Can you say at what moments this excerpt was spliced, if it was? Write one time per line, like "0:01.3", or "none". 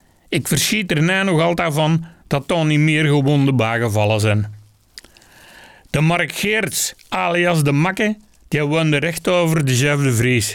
none